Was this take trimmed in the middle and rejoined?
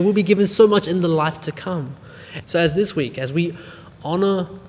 yes; 1 cut; at 2.4 s

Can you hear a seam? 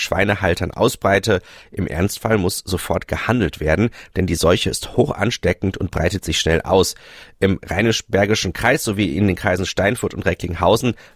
no; 0 cuts

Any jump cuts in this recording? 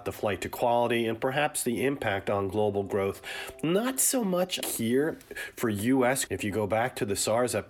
yes; 2 cuts; at 4.6 s, 6.3 s

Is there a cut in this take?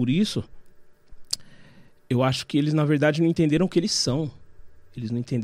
no; 0 cuts

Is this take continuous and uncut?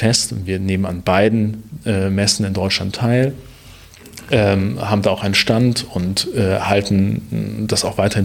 yes; 0 cuts

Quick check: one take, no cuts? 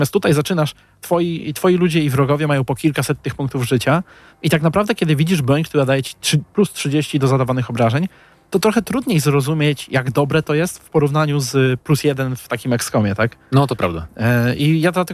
yes; 0 cuts

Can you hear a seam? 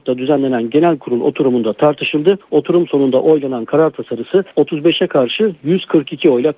no; 0 cuts

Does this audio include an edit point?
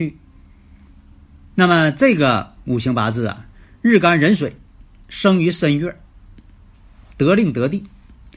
yes; 1 cut; at 1.5 s

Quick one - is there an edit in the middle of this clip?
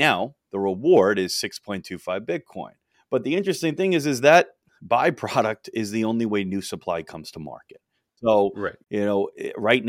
yes; 1 cut; at 2.9 s

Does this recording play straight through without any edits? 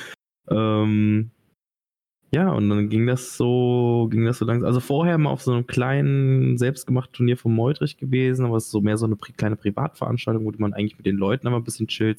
yes; 0 cuts

